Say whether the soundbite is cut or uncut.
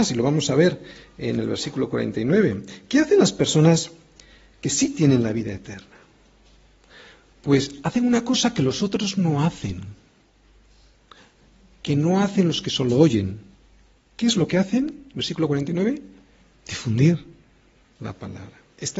uncut